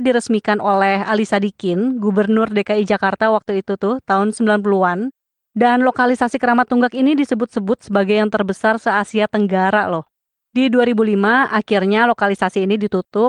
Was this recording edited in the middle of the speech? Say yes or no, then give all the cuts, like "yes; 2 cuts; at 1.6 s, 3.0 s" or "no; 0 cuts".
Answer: no; 0 cuts